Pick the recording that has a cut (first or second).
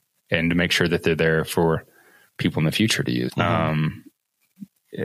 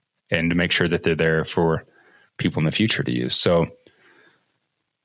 first